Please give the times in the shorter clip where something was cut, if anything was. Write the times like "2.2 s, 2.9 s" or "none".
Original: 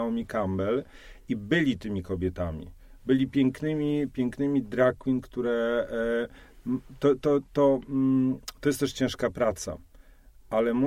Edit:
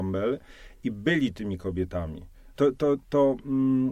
2.6 s